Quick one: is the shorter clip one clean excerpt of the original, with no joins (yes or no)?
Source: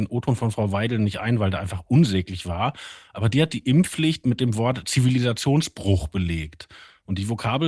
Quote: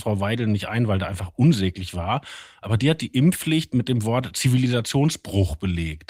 yes